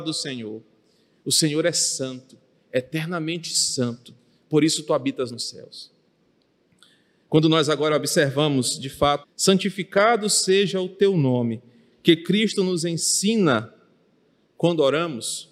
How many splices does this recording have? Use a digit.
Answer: 1